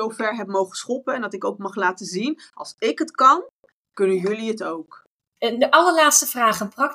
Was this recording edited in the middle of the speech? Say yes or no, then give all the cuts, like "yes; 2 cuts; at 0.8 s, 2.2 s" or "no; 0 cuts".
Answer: no; 0 cuts